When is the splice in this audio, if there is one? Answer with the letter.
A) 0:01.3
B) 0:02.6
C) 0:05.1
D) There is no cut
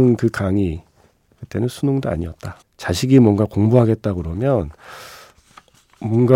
B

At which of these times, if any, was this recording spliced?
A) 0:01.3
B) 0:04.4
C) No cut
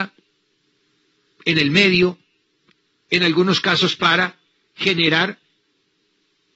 C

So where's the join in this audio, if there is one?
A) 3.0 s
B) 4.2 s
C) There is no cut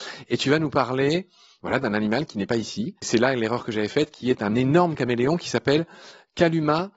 A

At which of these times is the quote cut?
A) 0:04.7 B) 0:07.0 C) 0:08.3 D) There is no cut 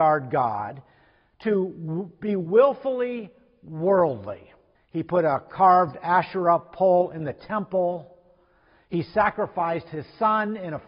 A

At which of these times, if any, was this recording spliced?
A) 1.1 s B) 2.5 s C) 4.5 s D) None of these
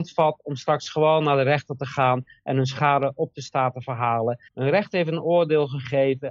C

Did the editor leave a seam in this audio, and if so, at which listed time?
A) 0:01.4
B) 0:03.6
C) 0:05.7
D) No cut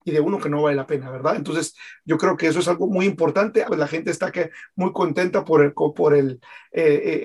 B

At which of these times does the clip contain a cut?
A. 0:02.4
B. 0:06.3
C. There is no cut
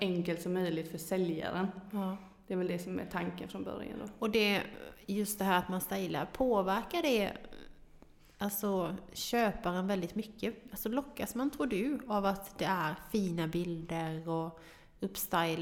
C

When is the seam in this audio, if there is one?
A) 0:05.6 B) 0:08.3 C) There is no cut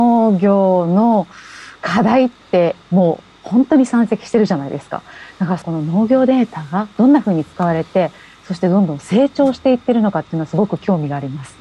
A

